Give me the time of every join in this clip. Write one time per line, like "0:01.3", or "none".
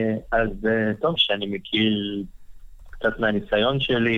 0:01.2